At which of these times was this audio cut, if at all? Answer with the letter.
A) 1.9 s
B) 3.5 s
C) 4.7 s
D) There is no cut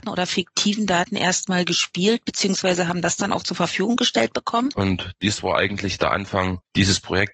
C